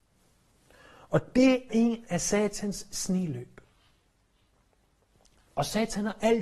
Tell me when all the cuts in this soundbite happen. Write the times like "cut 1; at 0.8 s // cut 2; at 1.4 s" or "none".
cut 1; at 1.7 s